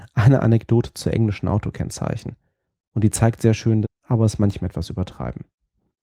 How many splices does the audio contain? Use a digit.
1